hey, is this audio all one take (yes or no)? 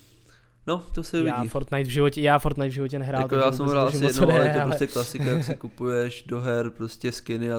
yes